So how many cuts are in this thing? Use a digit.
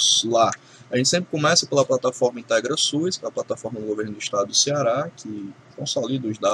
0